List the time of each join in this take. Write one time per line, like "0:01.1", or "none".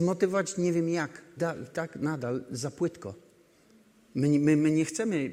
0:01.4